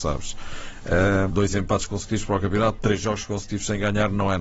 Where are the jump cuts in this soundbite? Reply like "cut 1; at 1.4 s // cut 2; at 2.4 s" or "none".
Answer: cut 1; at 1.3 s // cut 2; at 2.8 s